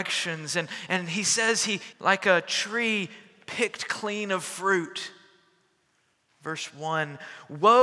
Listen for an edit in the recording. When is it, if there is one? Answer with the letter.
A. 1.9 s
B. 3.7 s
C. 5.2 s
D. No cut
A